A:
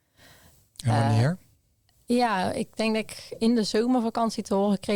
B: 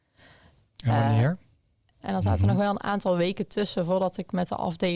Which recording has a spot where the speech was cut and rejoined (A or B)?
B